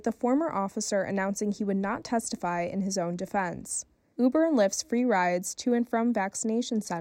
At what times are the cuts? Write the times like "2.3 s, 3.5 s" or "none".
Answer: 4.1 s